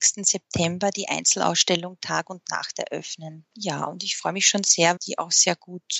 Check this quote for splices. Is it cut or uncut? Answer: cut